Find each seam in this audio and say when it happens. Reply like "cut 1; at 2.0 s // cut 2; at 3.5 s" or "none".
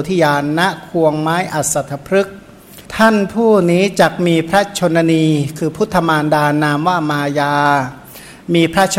cut 1; at 2.9 s